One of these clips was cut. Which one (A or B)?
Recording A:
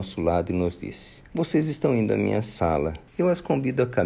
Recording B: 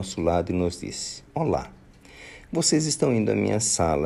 A